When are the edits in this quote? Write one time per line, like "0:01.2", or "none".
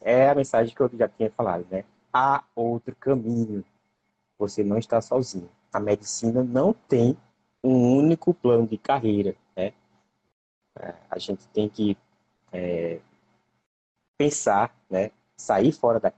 none

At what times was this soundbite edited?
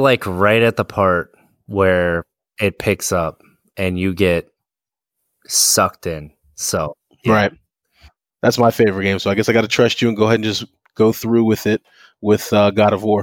0:08.3

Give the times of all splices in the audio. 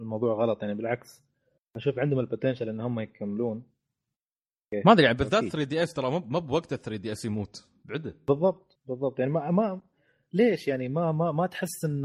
0:08.7

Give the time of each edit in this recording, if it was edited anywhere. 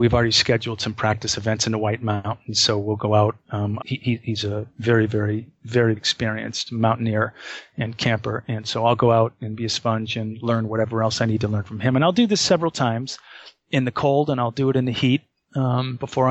0:03.8
0:06.0

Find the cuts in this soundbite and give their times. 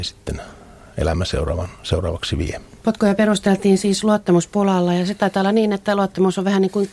0:02.8

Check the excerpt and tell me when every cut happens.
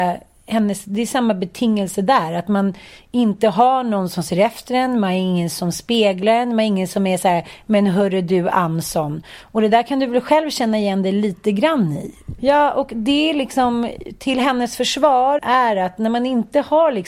0:12.4
0:15.4

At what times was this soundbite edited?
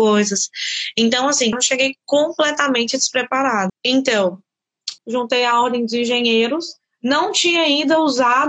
0:01.5
0:03.7
0:05.0

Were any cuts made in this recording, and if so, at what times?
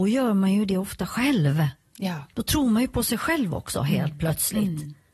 none

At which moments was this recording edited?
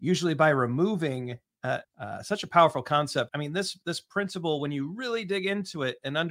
0:01.8
0:03.3

